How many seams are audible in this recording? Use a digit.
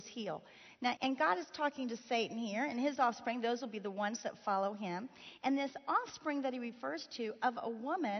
1